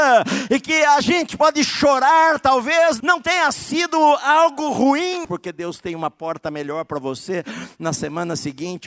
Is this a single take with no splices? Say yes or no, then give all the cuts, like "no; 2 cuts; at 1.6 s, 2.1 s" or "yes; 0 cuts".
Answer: no; 2 cuts; at 3.0 s, 5.2 s